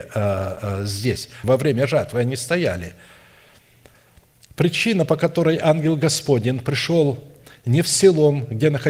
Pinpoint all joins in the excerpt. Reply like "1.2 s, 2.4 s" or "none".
1.4 s